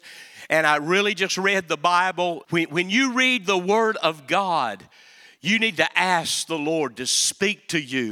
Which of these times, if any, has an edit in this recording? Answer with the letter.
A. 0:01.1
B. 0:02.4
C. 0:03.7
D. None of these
B